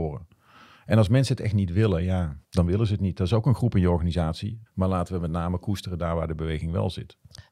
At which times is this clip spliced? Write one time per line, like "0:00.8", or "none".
0:02.4
0:04.7